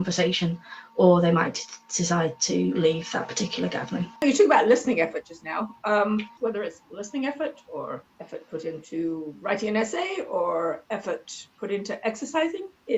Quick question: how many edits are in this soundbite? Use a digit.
3